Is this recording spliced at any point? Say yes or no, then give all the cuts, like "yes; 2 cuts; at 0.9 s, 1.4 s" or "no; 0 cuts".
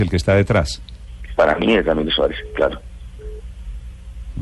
no; 0 cuts